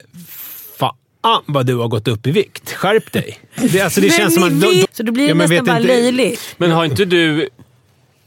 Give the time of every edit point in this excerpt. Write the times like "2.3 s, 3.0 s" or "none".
4.9 s